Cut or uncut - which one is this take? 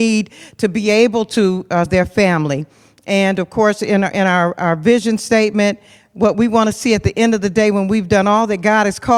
cut